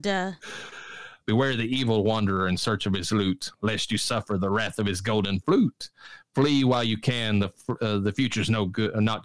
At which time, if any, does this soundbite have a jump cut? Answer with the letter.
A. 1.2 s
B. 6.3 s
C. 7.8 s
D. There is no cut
A